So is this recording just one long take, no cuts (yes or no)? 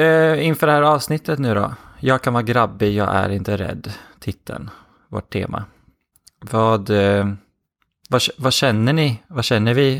yes